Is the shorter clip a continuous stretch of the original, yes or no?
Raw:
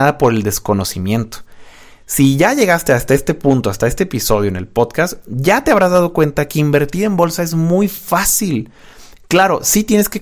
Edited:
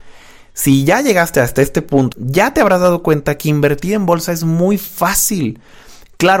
no